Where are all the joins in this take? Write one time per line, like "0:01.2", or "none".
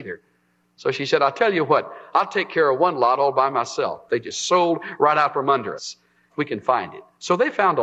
0:04.1
0:06.3